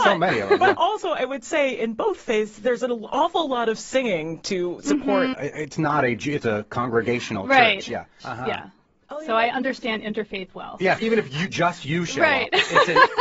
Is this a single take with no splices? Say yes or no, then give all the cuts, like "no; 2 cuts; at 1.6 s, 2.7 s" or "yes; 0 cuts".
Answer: no; 3 cuts; at 5.3 s, 8.2 s, 11.0 s